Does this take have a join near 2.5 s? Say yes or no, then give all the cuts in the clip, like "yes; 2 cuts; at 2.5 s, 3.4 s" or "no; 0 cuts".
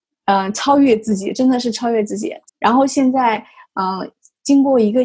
yes; 1 cut; at 2.5 s